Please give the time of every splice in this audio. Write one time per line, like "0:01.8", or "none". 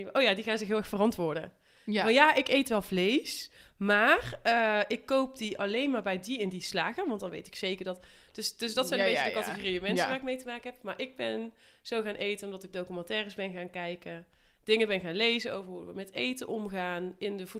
none

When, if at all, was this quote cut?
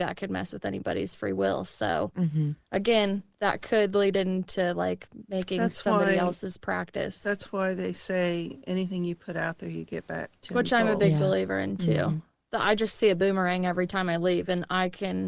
none

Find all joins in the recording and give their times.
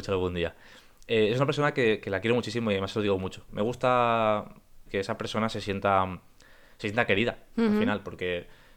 0:03.5
0:04.9

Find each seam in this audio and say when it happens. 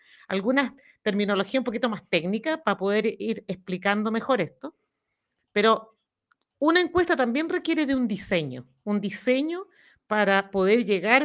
none

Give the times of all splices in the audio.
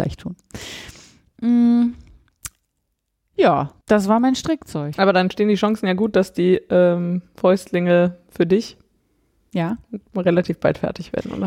0:03.8

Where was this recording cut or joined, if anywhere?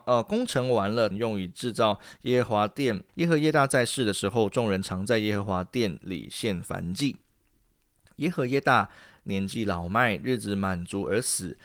0:01.1
0:03.1

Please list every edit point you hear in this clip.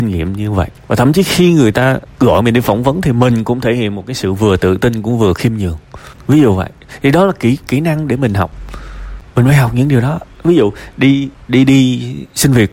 none

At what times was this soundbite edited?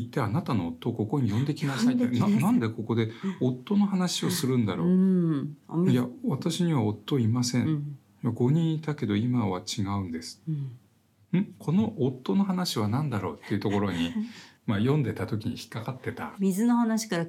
0:16.4

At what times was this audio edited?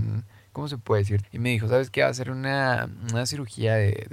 0:01.2

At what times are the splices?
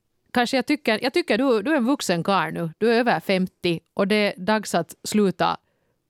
none

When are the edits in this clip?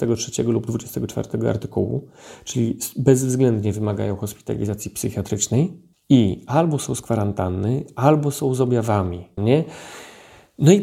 0:09.4

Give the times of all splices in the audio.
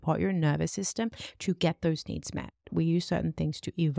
0:02.6

